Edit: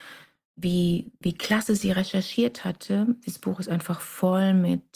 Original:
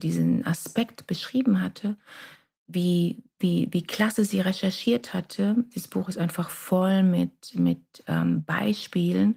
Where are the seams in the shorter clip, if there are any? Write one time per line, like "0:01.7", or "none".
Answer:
0:01.2